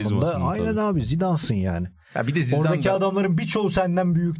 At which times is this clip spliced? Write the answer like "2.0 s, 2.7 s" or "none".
none